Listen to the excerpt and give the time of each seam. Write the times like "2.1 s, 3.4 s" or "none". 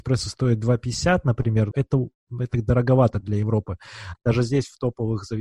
1.7 s, 4.1 s